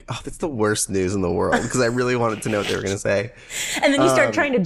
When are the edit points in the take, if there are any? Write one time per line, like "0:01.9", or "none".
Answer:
none